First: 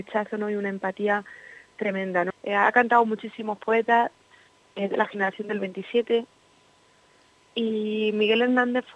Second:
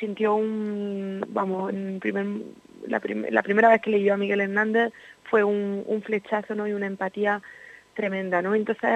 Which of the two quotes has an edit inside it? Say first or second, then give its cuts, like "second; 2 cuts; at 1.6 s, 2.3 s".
first; 1 cut; at 2.3 s